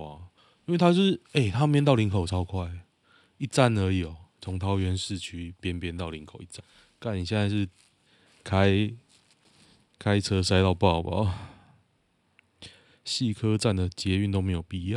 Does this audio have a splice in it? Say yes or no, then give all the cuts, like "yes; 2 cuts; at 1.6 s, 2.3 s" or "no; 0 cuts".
yes; 1 cut; at 1.2 s